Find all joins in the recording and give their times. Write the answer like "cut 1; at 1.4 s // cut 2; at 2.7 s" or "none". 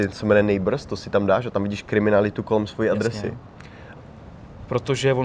cut 1; at 4.0 s